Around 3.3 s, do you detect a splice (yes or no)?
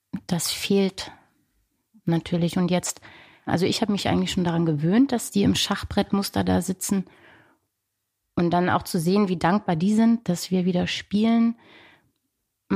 no